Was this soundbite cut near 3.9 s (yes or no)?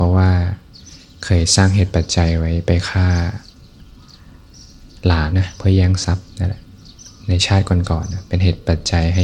no